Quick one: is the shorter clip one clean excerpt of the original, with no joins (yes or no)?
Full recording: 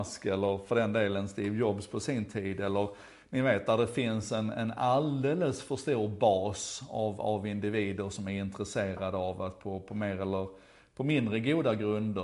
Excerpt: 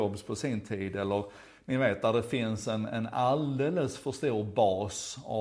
yes